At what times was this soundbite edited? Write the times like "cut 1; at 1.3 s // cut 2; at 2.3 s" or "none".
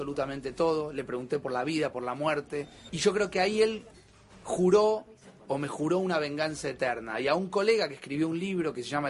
cut 1; at 2.9 s